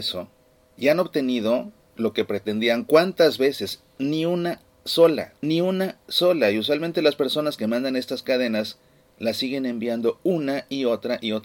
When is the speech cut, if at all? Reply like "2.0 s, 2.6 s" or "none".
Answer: 5.4 s